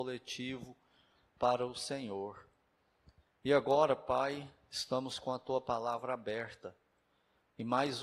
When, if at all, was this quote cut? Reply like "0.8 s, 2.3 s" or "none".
none